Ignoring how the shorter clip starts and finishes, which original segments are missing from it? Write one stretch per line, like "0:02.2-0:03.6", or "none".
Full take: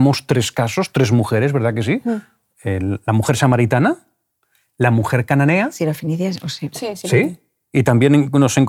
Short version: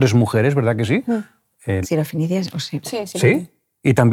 0:02.8-0:05.7